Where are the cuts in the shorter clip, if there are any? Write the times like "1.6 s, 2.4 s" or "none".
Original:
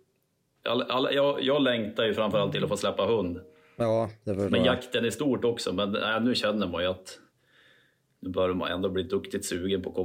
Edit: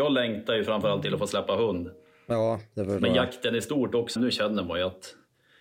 4.2 s